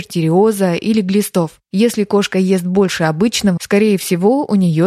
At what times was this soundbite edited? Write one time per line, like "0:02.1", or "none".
0:03.6